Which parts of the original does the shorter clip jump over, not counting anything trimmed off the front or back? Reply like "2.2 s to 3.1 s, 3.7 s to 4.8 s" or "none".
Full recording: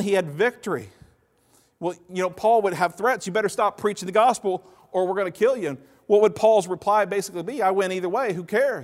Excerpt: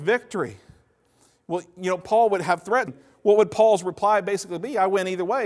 3.2 s to 5.7 s